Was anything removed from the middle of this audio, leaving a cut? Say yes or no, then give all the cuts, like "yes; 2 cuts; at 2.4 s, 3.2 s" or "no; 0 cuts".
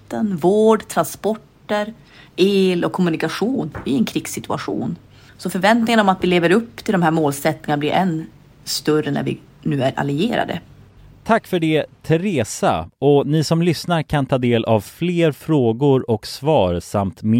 no; 0 cuts